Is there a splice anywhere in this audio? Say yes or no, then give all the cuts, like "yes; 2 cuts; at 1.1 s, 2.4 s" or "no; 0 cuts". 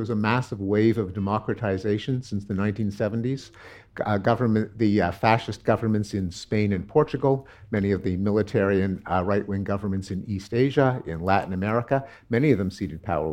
no; 0 cuts